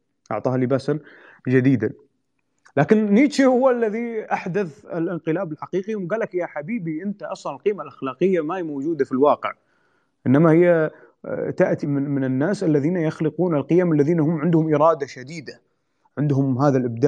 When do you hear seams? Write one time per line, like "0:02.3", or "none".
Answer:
0:11.8